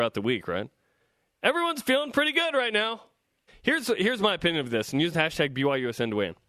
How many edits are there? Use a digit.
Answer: 1